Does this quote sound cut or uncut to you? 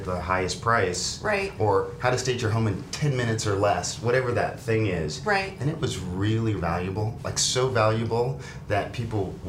cut